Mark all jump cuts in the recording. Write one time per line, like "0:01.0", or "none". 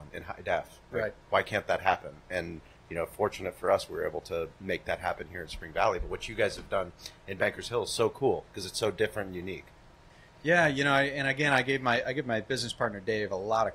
none